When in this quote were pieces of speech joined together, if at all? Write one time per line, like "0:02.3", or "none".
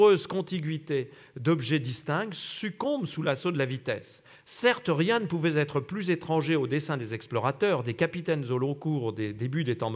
0:04.3